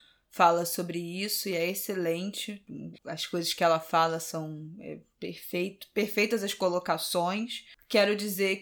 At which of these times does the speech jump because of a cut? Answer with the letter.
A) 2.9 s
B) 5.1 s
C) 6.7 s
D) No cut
A